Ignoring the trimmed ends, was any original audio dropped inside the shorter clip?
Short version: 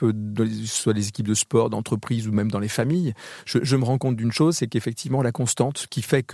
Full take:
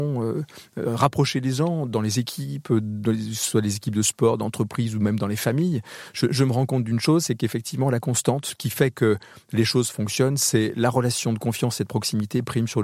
no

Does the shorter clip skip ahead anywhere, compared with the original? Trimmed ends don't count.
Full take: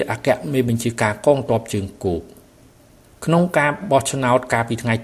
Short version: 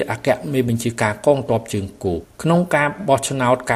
yes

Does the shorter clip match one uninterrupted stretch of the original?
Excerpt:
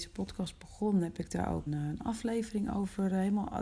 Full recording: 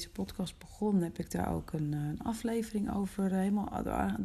no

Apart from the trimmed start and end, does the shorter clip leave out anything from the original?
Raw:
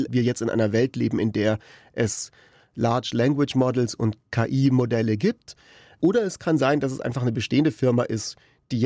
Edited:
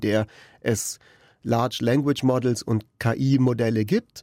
no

